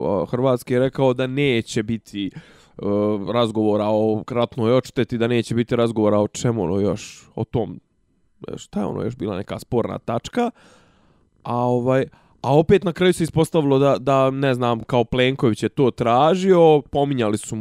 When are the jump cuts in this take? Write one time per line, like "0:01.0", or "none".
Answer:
none

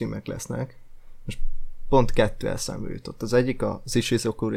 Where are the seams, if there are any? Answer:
none

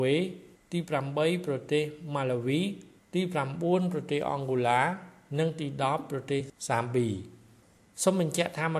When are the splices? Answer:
none

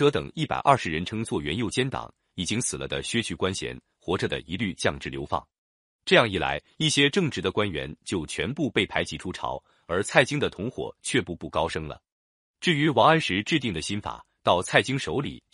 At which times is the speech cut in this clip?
none

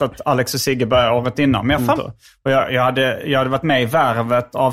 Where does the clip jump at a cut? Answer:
0:02.0

